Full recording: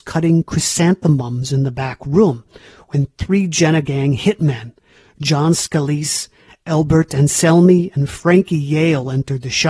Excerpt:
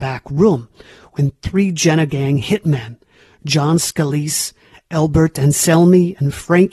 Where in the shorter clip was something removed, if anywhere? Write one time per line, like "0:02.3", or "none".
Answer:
none